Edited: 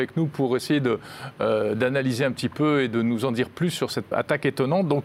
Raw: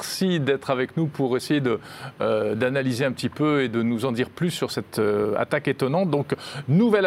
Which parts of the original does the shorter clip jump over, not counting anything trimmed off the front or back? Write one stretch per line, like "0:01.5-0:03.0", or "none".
0:04.9-0:05.3